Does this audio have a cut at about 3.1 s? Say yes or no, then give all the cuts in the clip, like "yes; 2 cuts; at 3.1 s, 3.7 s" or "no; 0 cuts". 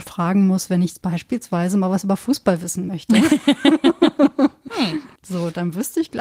no; 1 cut; at 5.2 s